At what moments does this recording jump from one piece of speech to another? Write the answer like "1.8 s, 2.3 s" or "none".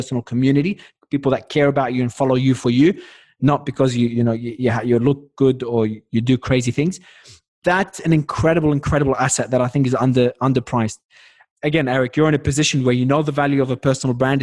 none